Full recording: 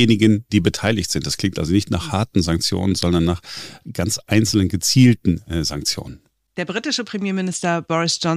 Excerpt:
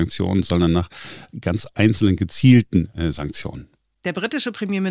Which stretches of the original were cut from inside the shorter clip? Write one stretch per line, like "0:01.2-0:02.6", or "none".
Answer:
none